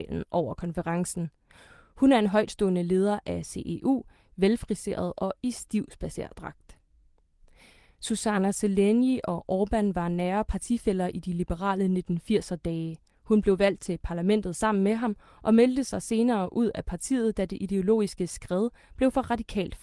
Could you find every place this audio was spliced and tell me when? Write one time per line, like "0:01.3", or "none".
none